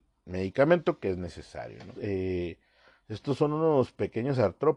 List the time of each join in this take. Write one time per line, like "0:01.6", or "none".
0:01.9

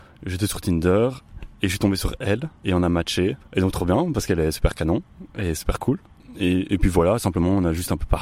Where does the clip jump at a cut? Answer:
none

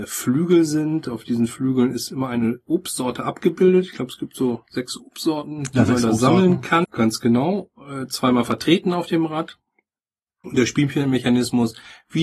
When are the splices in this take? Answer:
0:06.8
0:10.4

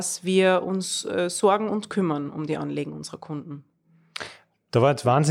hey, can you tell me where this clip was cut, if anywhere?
none

